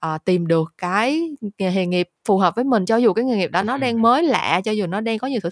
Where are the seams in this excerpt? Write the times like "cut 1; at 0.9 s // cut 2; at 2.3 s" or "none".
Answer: none